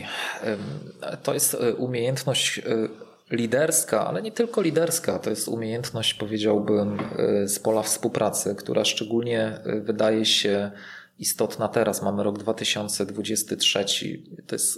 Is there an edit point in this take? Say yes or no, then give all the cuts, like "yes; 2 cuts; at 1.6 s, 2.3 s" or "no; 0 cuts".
no; 0 cuts